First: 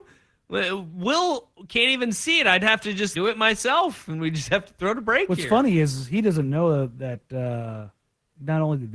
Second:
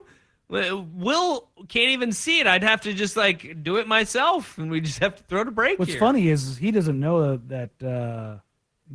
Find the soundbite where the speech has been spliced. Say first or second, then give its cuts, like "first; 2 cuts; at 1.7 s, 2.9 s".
first; 1 cut; at 3.1 s